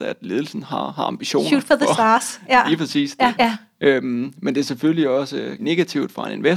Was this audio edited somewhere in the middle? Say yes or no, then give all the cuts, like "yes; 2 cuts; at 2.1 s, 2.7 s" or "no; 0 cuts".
yes; 2 cuts; at 3.4 s, 5.6 s